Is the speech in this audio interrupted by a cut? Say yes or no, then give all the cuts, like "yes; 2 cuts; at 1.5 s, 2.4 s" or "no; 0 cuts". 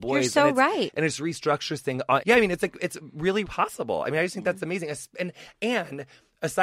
yes; 2 cuts; at 2.2 s, 3.5 s